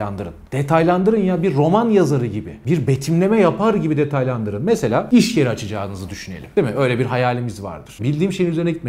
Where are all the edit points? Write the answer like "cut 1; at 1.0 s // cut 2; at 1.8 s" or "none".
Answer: cut 1; at 8.0 s